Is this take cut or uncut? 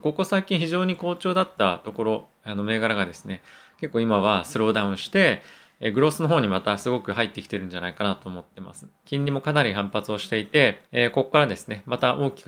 cut